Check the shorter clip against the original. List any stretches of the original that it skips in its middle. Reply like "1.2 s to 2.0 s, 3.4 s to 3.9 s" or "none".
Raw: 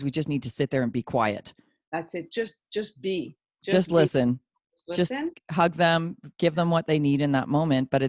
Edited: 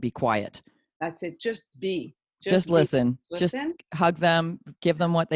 2.6 s to 2.9 s, 4.5 s to 4.8 s